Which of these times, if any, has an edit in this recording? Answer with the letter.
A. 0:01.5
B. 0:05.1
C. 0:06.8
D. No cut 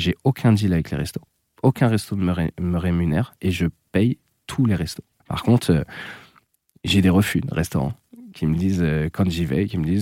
D